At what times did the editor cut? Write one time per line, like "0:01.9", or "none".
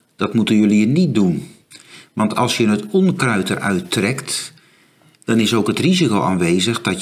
none